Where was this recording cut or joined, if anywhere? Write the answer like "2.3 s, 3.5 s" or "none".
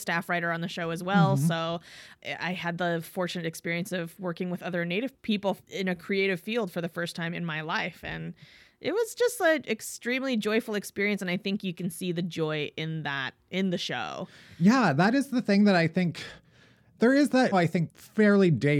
17.5 s